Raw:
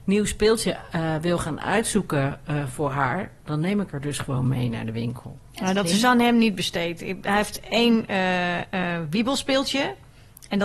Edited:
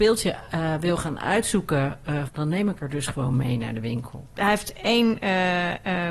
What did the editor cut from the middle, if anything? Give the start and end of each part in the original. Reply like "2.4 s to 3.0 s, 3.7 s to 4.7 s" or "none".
2.7 s to 3.4 s, 5.5 s to 7.2 s